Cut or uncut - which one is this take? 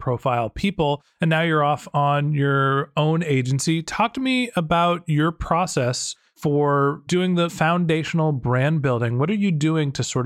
uncut